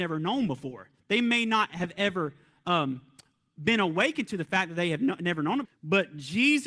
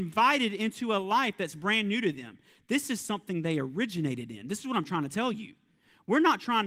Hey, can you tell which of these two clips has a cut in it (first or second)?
first